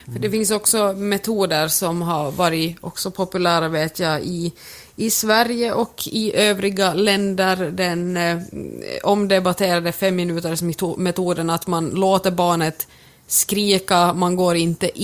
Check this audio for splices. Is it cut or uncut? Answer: uncut